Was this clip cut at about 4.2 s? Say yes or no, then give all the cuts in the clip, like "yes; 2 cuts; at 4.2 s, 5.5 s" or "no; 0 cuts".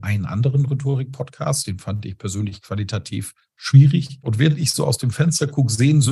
yes; 1 cut; at 4.2 s